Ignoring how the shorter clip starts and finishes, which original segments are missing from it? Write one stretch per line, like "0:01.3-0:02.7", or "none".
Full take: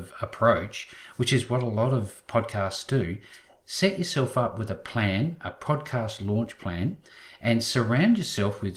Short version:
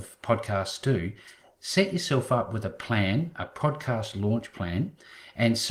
none